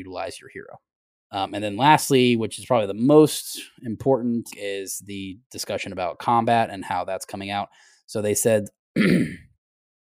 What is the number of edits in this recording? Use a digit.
2